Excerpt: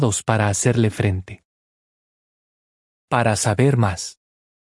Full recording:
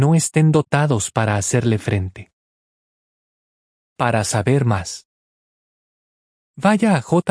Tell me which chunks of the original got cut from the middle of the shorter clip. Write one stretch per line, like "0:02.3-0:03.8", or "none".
none

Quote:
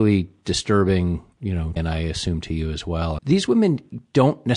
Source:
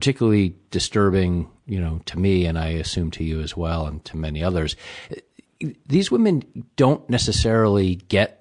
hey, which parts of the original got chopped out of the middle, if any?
0:02.0-0:02.5
0:03.9-0:05.8

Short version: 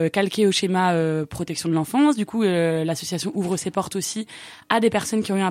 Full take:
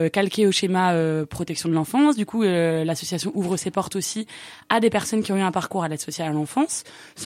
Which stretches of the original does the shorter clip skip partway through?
none

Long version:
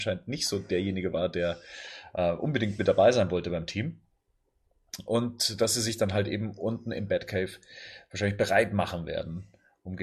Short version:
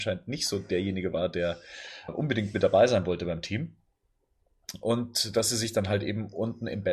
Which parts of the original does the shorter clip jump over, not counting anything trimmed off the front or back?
0:02.1-0:02.3

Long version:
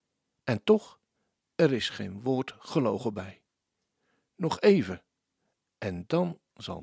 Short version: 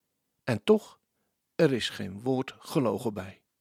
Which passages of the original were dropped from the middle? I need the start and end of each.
none

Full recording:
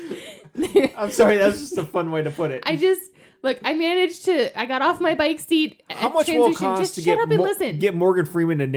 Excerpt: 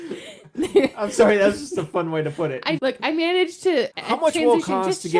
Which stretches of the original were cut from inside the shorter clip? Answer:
0:02.8-0:03.4
0:04.5-0:05.8

